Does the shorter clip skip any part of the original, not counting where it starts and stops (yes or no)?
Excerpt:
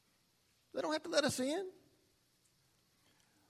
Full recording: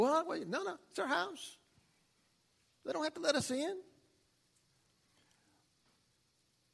no